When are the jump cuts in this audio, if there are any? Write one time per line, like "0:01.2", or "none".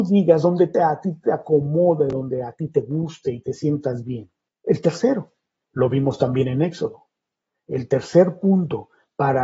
0:04.5